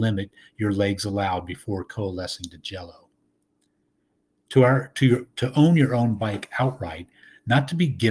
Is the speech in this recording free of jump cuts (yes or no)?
yes